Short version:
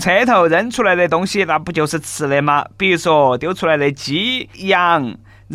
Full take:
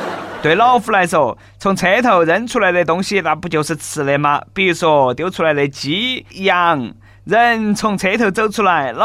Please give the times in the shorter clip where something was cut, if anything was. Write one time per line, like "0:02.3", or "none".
none